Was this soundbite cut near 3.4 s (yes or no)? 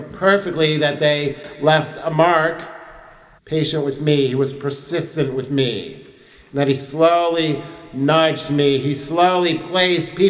yes